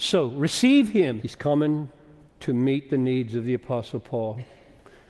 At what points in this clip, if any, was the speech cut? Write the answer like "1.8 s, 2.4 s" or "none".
1.2 s